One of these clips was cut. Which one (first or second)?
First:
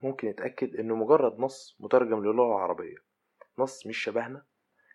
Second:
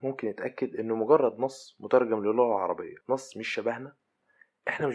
second